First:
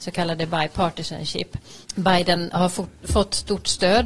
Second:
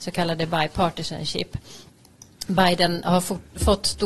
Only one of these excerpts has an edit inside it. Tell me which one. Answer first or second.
first